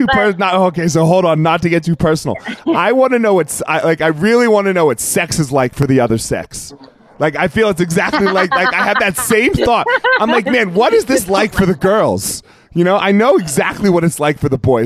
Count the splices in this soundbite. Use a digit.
0